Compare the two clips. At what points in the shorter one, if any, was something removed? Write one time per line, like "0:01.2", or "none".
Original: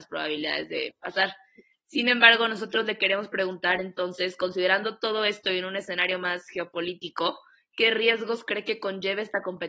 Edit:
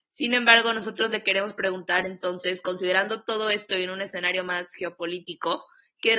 none